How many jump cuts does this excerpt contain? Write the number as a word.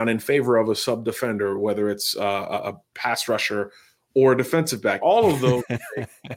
one